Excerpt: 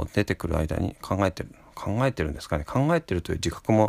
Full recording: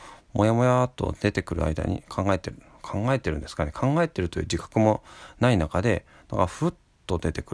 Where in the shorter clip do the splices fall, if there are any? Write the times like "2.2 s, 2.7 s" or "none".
none

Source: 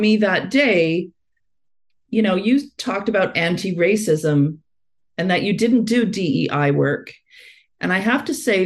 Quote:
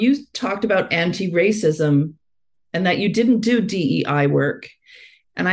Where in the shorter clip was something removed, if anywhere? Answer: none

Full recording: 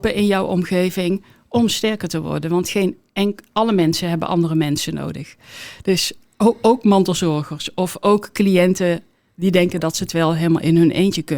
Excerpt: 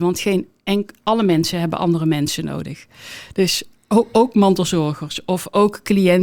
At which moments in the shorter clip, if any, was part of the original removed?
none

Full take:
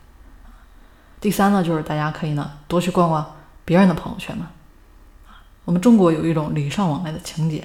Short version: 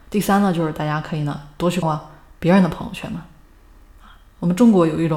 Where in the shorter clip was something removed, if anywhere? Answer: 1.8 s

